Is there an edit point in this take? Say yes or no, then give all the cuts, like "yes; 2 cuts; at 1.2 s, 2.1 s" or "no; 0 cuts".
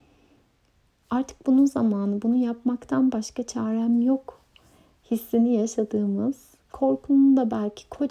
no; 0 cuts